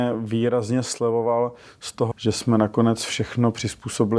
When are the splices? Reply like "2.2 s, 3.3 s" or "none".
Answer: 2.1 s